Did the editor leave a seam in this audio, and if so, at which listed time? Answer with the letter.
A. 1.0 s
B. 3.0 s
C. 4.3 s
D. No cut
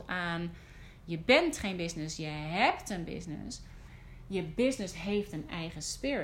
D